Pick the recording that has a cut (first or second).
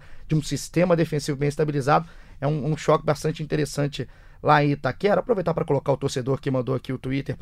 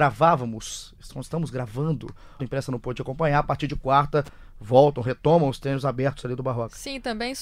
second